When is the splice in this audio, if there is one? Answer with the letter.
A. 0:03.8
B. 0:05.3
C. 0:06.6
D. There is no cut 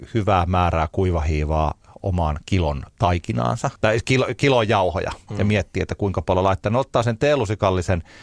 A